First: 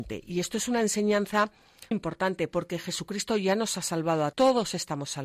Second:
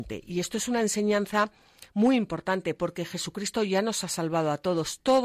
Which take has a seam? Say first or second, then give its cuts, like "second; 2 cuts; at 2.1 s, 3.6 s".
first; 2 cuts; at 1.9 s, 4.3 s